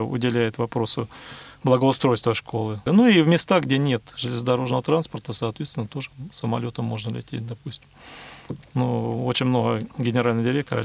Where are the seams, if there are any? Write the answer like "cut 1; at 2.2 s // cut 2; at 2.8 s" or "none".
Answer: cut 1; at 2.9 s // cut 2; at 8.6 s